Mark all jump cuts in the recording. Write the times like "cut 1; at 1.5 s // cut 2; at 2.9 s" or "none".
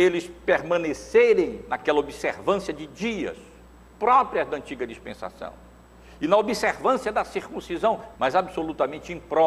cut 1; at 8.1 s